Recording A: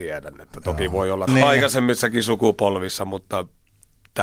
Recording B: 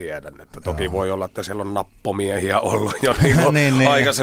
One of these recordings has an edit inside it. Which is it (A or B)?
A